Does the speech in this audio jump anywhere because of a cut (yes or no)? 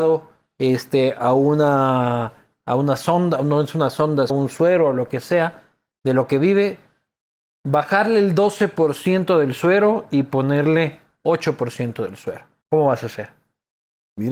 yes